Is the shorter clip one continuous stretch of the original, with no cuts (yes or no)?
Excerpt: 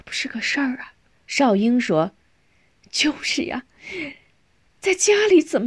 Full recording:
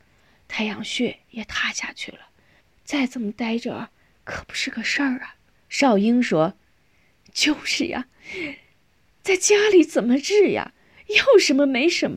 yes